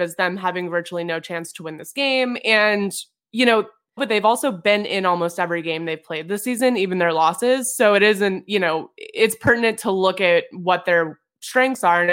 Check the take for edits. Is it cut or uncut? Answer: cut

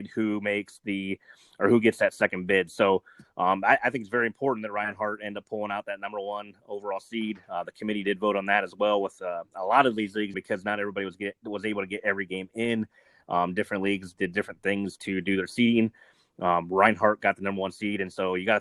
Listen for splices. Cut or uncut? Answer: cut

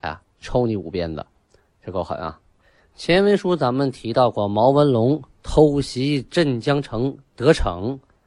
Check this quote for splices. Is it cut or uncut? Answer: uncut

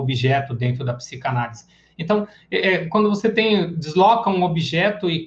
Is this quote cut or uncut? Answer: uncut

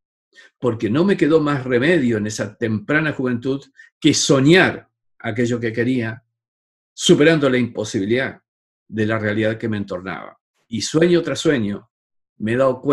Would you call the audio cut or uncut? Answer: cut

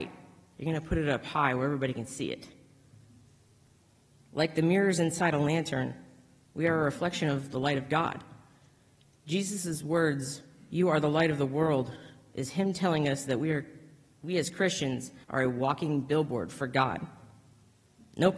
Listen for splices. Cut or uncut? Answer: cut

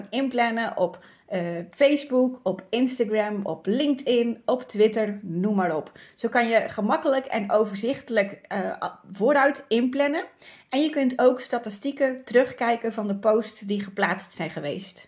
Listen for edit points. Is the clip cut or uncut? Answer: uncut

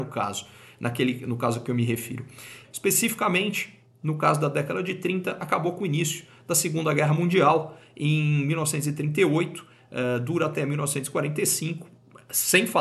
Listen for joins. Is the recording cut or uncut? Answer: cut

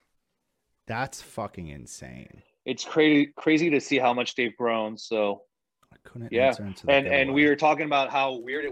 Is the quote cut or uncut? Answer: uncut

